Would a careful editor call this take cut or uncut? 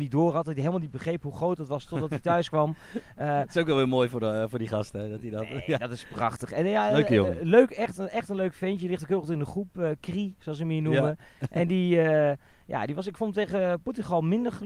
uncut